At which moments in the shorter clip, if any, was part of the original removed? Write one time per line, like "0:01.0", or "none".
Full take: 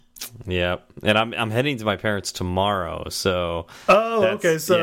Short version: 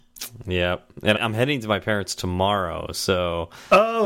0:01.1